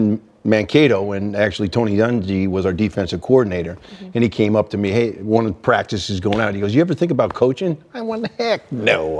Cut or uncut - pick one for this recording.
uncut